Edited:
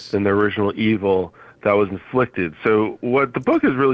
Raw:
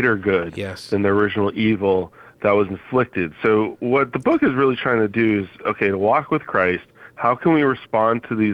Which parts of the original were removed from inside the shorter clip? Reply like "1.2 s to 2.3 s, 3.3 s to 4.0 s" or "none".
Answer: none